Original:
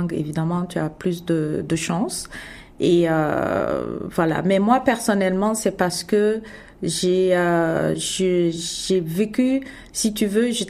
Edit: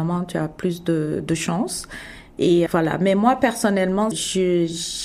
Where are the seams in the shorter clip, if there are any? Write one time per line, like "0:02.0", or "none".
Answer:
0:02.7
0:04.1